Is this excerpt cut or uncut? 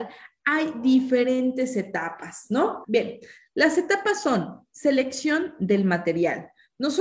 cut